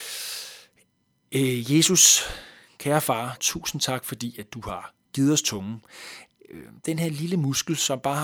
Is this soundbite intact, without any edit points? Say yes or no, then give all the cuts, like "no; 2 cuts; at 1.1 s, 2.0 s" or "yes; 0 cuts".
no; 1 cut; at 3.4 s